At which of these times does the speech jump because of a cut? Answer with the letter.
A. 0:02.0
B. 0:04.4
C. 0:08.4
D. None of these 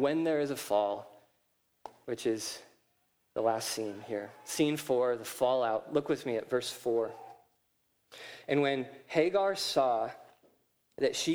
A